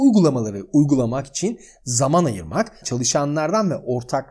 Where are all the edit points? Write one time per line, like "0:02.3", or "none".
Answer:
0:02.8